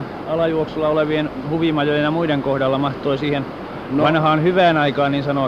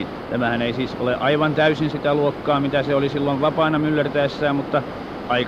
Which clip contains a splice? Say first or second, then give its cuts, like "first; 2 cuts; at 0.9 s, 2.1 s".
second; 1 cut; at 1.9 s